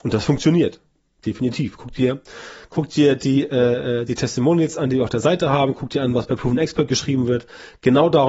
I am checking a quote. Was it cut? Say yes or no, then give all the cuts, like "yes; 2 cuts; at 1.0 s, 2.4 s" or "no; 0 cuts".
no; 0 cuts